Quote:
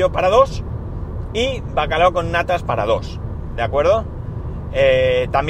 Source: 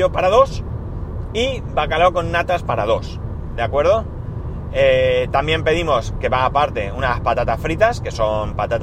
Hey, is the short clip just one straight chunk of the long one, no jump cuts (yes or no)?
yes